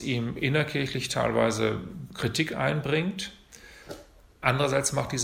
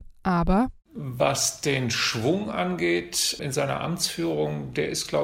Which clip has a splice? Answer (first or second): second